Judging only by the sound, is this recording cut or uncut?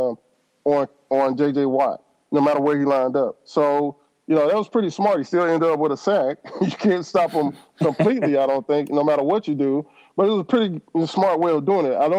uncut